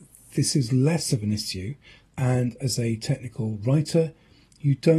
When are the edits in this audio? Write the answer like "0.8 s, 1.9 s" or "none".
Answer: 2.0 s